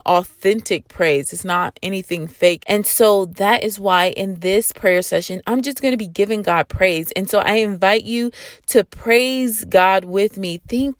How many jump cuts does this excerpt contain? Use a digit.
1